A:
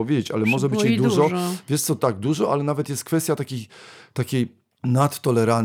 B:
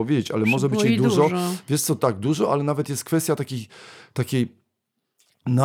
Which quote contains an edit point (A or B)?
A